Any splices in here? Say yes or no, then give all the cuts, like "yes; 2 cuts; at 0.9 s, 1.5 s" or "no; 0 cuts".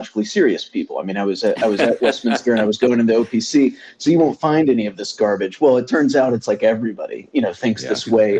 no; 0 cuts